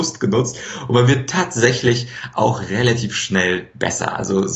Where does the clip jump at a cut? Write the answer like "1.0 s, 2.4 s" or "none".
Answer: none

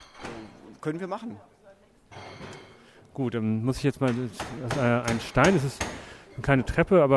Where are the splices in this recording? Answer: 4.7 s

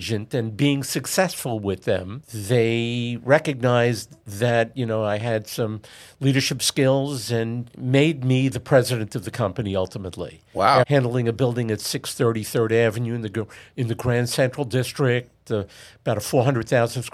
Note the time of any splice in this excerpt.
10.8 s

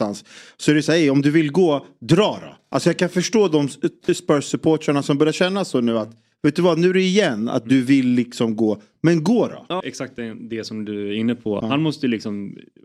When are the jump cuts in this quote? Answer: 9.8 s, 11.6 s

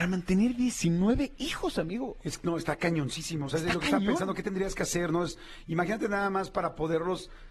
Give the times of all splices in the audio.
none

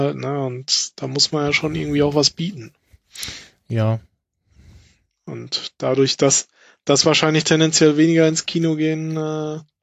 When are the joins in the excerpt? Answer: none

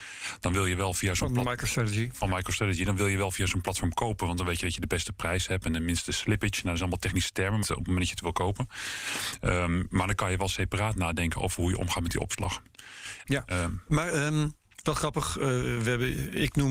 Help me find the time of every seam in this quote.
7.6 s, 13.2 s

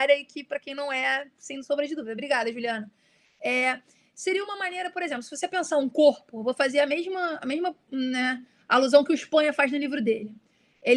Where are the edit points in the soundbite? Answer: none

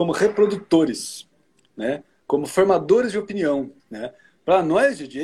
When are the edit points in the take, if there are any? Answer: 3.8 s

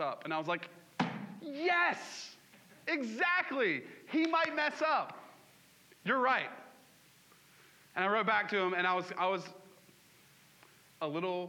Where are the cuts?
none

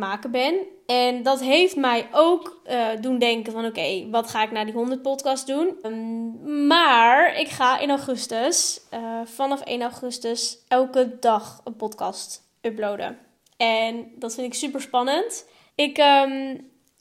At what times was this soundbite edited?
5.8 s, 15.7 s

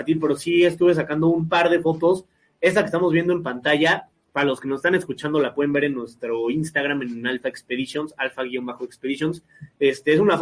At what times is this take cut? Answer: none

